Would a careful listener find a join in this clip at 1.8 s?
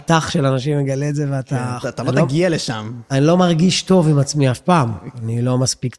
yes; 1 cut; at 1.8 s

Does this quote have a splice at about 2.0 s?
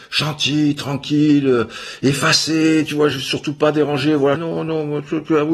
no; 1 cut; at 4.4 s

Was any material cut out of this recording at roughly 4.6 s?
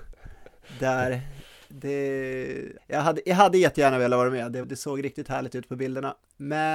yes; 2 cuts; at 2.8 s, 4.6 s

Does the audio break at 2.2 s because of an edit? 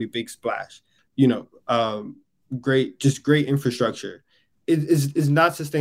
no; 2 cuts; at 1.0 s, 4.6 s

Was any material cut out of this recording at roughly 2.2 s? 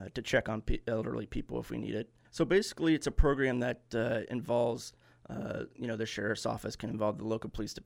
yes; 1 cut; at 2.2 s

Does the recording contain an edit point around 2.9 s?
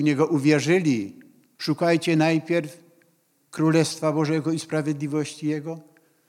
no; 1 cut; at 1.5 s

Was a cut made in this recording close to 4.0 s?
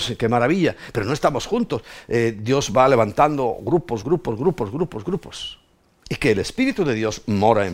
yes; 2 cuts; at 4.0 s, 6.0 s

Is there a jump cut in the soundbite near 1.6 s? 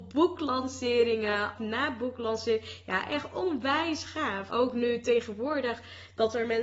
yes; 2 cuts; at 1.6 s, 4.5 s

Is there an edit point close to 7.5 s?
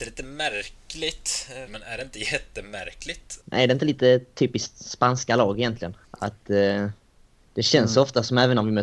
no; 3 cuts; at 1.7 s, 3.4 s, 6.0 s

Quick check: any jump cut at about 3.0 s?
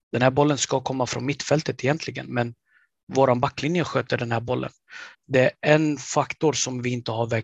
no; 1 cut; at 5.1 s

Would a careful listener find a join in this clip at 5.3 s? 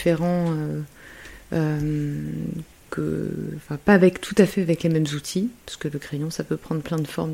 no; 1 cut; at 2.9 s

